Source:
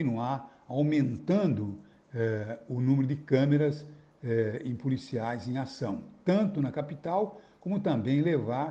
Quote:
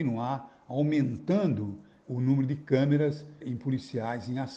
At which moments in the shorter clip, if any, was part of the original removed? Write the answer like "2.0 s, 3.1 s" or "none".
2.1 s, 3.4 s